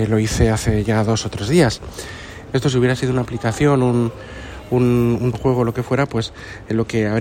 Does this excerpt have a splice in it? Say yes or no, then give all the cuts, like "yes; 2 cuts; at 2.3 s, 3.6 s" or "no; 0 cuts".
yes; 2 cuts; at 2.5 s, 5.3 s